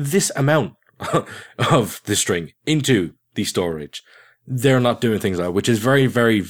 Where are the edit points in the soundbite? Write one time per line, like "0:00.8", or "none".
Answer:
none